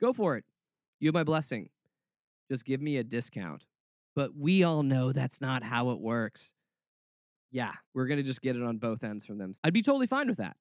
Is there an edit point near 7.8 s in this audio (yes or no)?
yes